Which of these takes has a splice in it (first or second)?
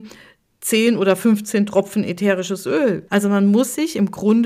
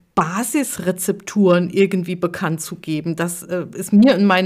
first